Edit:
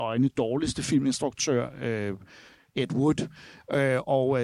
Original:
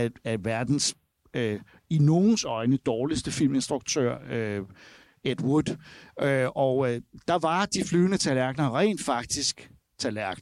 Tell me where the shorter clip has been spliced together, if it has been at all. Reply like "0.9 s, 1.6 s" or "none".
none